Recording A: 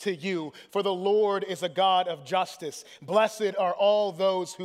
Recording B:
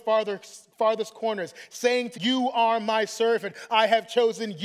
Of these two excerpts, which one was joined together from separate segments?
B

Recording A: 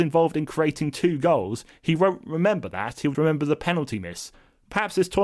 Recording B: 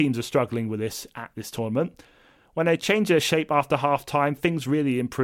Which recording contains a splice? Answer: A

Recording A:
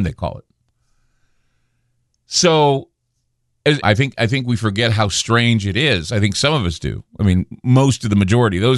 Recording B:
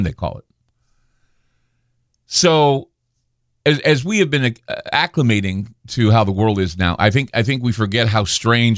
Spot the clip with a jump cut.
A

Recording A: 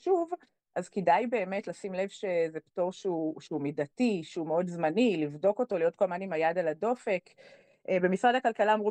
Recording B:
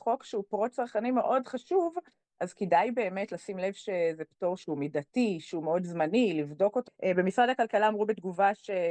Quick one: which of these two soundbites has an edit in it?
B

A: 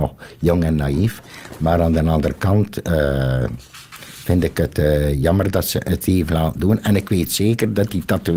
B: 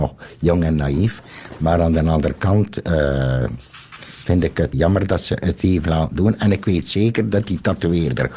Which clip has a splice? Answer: B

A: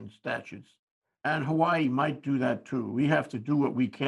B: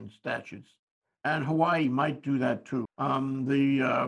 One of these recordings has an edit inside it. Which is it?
B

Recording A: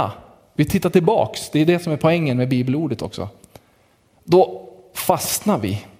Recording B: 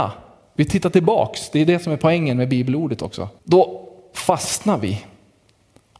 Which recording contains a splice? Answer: B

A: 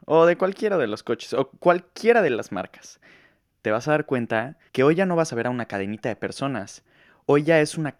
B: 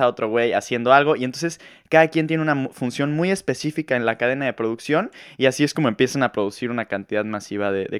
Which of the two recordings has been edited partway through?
A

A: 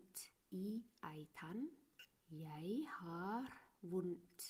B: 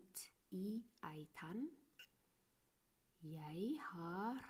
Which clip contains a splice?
A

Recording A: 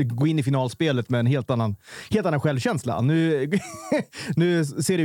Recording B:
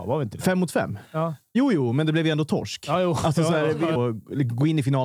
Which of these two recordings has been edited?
B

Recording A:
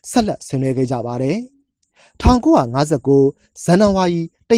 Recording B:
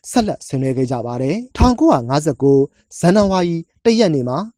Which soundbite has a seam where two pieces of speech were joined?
B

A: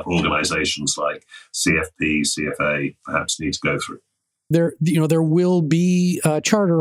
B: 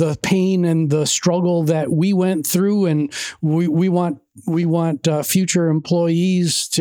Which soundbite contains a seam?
A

